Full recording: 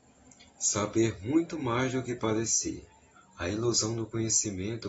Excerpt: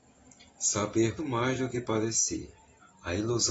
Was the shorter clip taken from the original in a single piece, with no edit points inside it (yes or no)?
no